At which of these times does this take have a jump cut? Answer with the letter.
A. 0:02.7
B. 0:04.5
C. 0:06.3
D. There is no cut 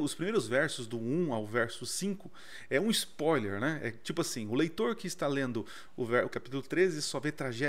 C